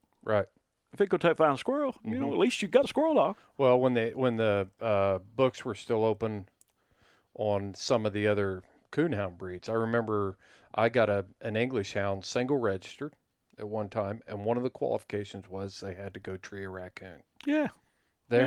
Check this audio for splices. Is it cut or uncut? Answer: uncut